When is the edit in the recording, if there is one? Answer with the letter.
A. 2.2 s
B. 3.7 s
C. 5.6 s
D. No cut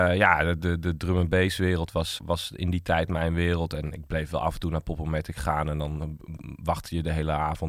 A